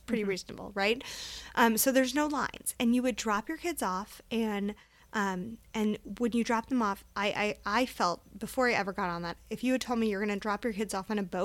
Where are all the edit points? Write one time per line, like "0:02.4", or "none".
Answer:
none